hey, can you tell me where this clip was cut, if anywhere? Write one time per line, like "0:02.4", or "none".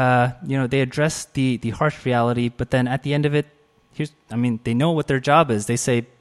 none